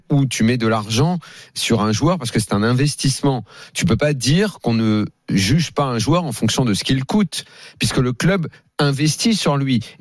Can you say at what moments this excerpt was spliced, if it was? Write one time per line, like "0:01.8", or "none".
none

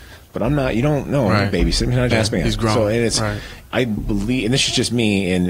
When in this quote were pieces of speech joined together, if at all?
0:02.1
0:03.7

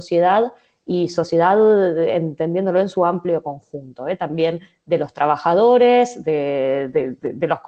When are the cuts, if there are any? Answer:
none

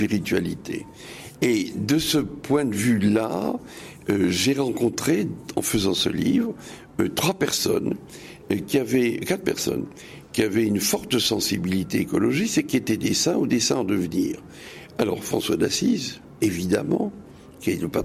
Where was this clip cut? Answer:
none

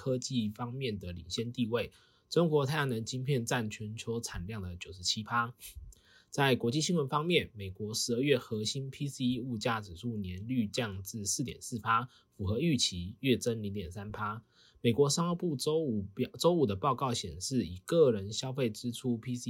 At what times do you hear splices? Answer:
none

